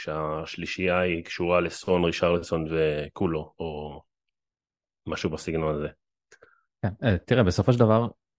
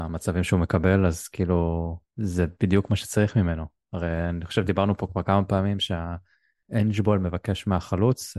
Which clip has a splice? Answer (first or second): second